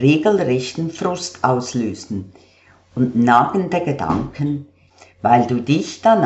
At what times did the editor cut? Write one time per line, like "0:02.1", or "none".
none